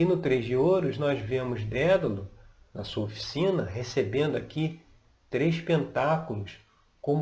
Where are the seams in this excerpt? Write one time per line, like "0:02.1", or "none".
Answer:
none